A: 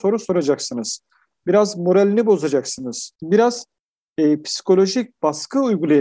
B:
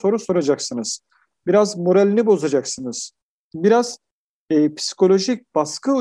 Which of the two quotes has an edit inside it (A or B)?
A